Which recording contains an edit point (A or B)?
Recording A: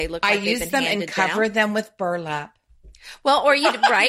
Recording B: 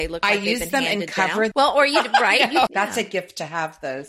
B